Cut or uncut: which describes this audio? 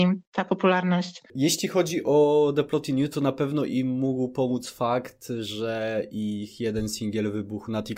uncut